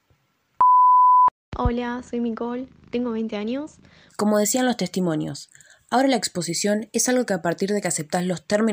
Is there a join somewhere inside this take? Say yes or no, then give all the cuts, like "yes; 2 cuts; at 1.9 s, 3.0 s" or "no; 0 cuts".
yes; 1 cut; at 4.1 s